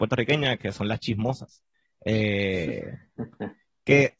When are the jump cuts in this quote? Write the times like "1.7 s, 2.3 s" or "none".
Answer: none